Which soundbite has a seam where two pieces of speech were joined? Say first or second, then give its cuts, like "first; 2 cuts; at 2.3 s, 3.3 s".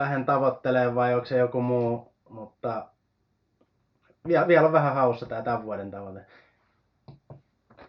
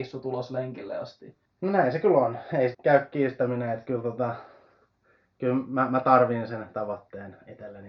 second; 2 cuts; at 1.5 s, 2.7 s